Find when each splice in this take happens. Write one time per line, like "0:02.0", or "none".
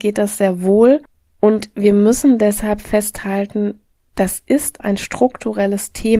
0:04.8